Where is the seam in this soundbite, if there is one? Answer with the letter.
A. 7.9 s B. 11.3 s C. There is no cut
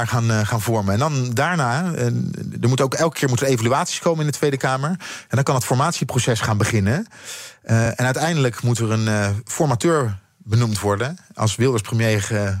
C